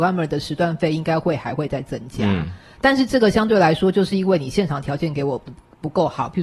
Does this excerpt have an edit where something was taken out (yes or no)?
no